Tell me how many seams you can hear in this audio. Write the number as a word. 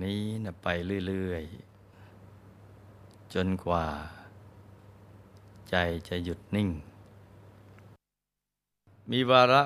zero